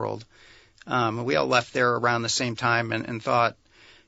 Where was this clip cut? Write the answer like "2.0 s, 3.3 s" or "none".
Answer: none

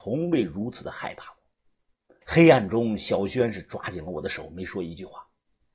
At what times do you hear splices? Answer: 2.2 s

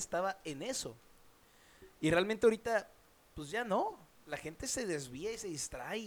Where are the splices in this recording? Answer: none

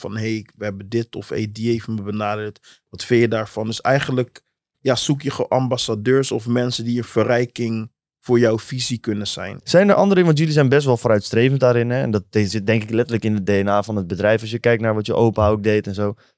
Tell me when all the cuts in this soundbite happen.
4.7 s, 9.6 s

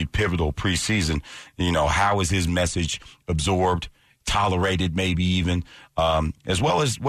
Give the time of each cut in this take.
none

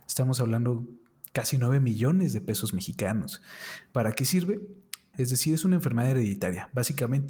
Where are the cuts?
5.1 s

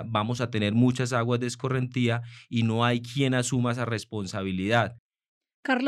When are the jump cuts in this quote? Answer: none

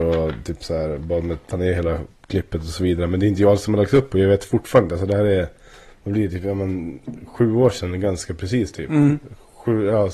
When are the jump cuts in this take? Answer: none

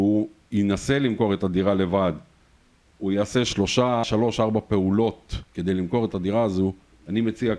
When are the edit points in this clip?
4.0 s, 5.5 s

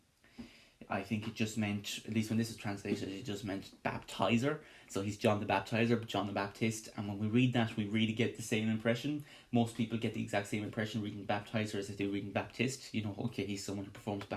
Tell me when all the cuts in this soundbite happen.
none

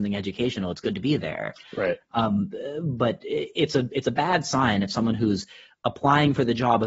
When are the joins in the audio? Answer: none

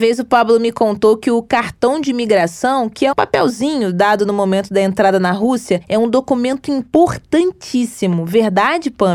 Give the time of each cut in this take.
3.1 s

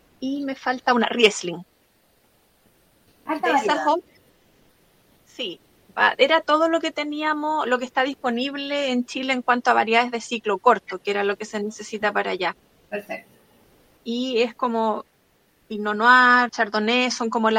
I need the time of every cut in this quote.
14.0 s, 16.5 s

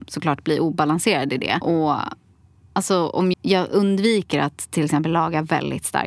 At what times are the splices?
1.6 s, 3.3 s

